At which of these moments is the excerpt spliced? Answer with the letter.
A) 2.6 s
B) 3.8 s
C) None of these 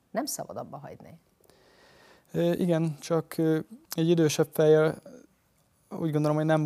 B